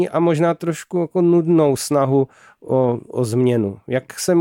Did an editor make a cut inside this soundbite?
no; 0 cuts

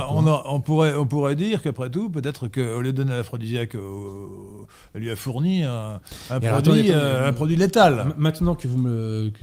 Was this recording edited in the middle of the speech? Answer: no; 0 cuts

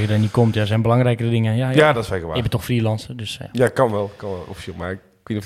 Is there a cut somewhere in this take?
no; 0 cuts

